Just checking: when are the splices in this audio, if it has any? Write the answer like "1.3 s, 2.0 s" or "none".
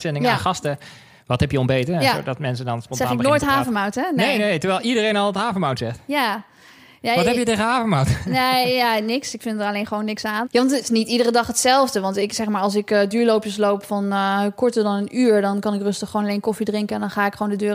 10.4 s